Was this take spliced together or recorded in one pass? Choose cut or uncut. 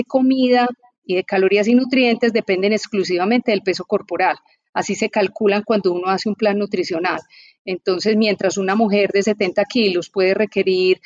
uncut